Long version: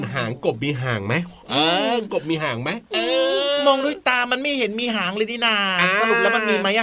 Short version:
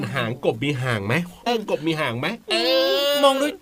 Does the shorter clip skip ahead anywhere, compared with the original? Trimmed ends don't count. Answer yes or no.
yes